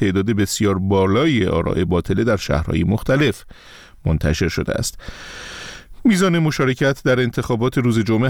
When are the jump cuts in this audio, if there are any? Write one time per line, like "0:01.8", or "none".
none